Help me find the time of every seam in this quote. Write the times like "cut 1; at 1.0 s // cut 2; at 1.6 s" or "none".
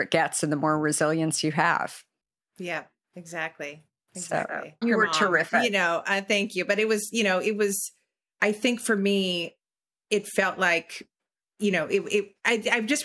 cut 1; at 4.8 s

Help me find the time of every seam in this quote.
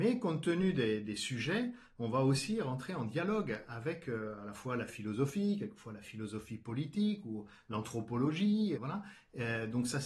cut 1; at 8.8 s

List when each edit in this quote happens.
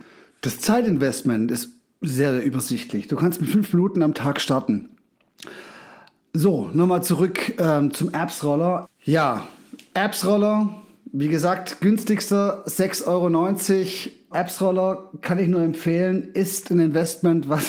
cut 1; at 8.8 s // cut 2; at 14.3 s

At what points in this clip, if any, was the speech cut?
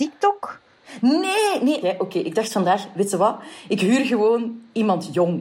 cut 1; at 1.8 s

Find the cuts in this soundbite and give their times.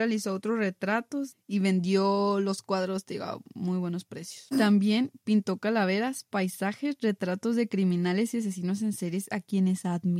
cut 1; at 4.5 s

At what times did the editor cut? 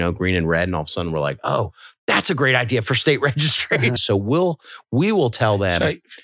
cut 1; at 4.0 s

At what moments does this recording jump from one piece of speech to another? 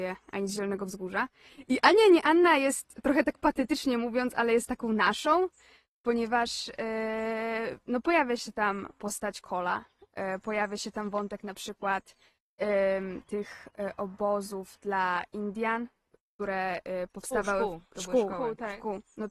cut 1; at 1.5 s

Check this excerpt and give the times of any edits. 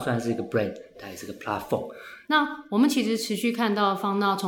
cut 1; at 0.9 s // cut 2; at 2.2 s

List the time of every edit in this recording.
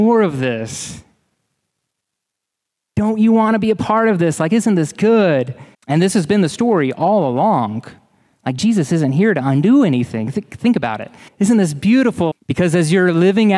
cut 1; at 5.7 s // cut 2; at 11.3 s // cut 3; at 12.3 s

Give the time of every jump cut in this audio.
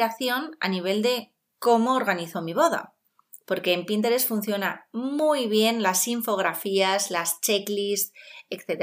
none

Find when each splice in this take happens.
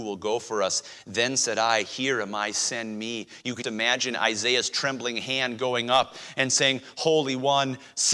cut 1; at 3.6 s

